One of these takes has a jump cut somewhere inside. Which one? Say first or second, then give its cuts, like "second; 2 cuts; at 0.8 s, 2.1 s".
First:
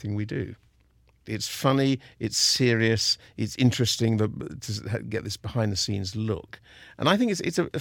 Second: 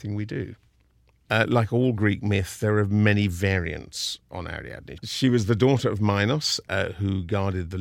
first; 1 cut; at 1.3 s